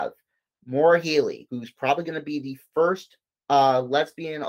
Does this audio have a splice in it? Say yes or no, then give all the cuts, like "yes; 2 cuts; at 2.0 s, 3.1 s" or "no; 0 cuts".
yes; 1 cut; at 1.5 s